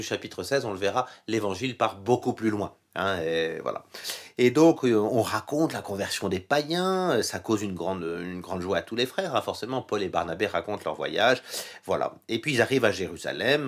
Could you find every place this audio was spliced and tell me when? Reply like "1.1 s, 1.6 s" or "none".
none